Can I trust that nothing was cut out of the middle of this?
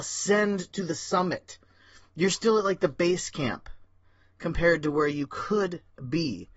yes; 0 cuts

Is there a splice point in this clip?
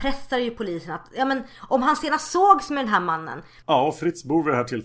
yes; 1 cut; at 3.6 s

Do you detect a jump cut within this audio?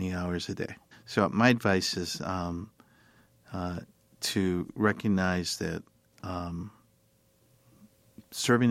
yes; 1 cut; at 0.9 s

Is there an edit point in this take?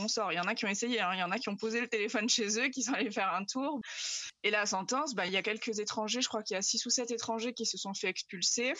yes; 2 cuts; at 3.8 s, 5.3 s

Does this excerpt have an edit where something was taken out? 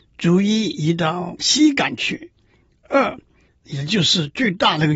yes; 1 cut; at 3.5 s

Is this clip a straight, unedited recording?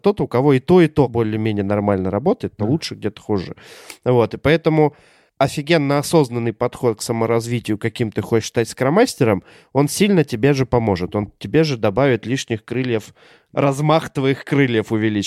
no; 1 cut; at 2.6 s

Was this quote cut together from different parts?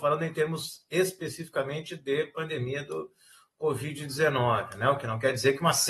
no; 0 cuts

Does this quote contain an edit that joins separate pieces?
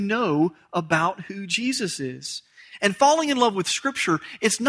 no; 0 cuts

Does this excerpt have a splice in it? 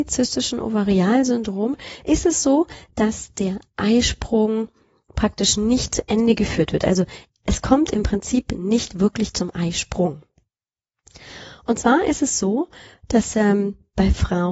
no; 0 cuts

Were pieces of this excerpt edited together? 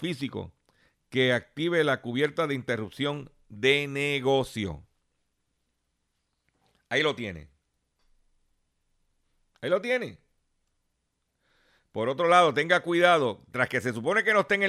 no; 0 cuts

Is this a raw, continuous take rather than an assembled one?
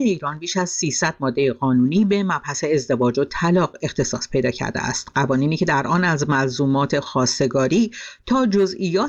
yes; 0 cuts

